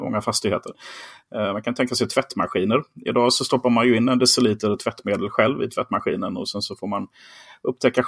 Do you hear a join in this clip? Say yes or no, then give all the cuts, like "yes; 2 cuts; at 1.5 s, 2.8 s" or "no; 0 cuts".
no; 0 cuts